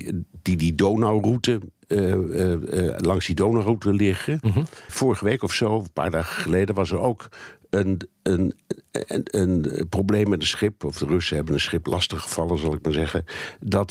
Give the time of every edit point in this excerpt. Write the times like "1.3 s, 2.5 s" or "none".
4.9 s